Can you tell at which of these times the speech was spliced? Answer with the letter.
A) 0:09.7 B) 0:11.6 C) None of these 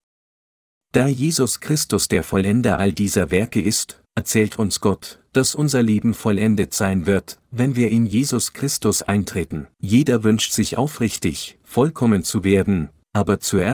A